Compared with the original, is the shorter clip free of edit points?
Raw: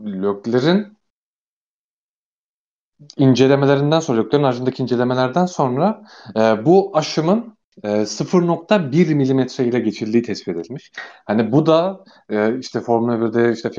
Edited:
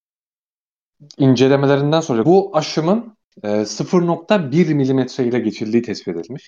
no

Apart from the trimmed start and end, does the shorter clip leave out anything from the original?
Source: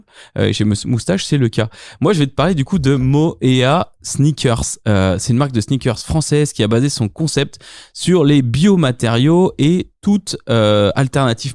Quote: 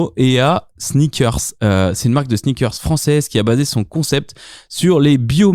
no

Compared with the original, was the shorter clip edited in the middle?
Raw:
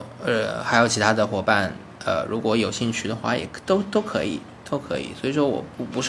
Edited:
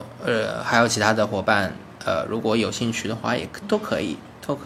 yes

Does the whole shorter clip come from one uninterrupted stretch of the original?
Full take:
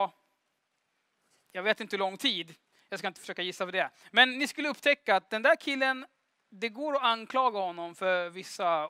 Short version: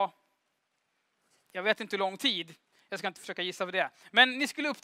yes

